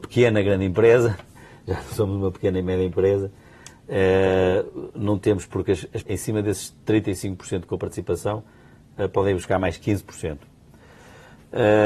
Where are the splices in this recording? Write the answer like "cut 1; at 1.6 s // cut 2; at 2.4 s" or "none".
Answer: cut 1; at 6.0 s